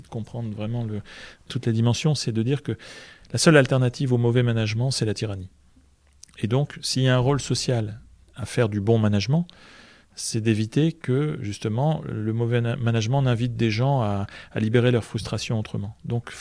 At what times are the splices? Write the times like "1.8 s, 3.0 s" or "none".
none